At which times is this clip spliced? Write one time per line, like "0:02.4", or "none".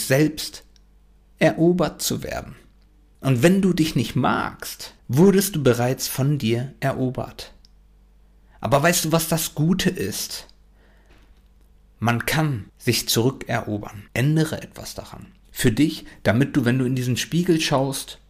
0:05.0
0:12.7
0:14.1